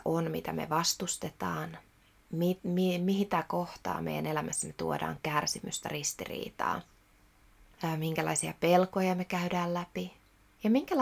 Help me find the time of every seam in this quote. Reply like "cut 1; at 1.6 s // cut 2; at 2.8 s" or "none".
none

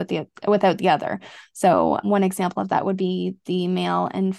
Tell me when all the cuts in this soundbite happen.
cut 1; at 2.0 s

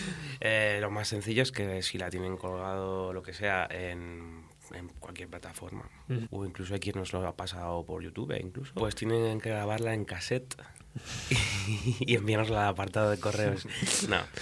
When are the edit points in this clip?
cut 1; at 6.2 s // cut 2; at 8.8 s

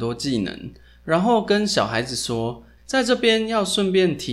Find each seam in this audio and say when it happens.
cut 1; at 2.8 s

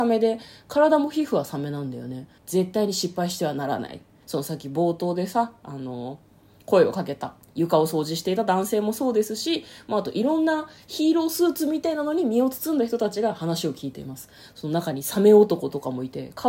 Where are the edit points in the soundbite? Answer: cut 1; at 2.4 s // cut 2; at 4.2 s

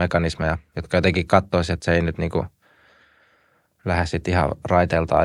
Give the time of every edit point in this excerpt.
none

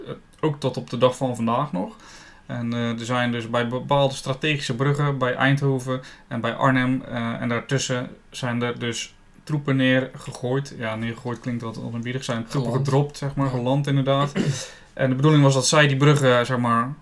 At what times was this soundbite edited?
none

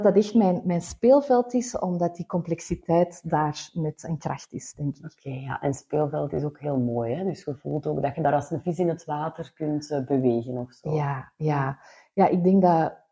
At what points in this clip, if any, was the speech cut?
none

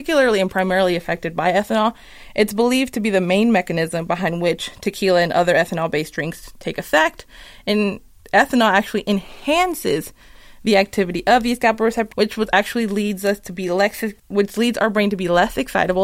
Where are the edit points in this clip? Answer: cut 1; at 12.1 s // cut 2; at 14.2 s

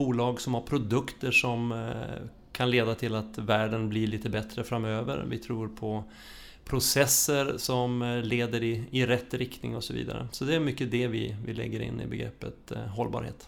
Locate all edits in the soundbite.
none

